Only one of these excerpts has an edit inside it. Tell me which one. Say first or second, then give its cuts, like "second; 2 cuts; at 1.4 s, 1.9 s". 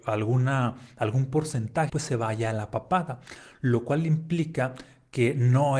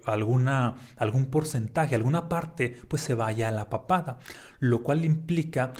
first; 1 cut; at 1.9 s